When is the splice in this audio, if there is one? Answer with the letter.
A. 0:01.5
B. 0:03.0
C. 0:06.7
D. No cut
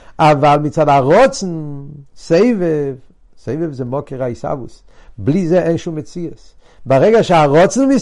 D